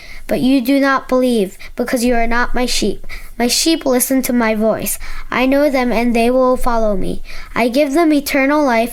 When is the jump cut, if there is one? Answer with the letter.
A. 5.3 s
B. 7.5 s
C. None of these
C